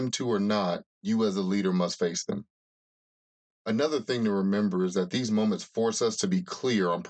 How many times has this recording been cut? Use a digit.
1